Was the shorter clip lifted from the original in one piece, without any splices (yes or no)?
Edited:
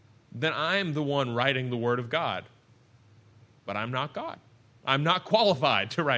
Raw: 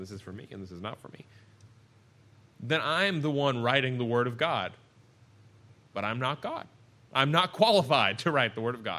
yes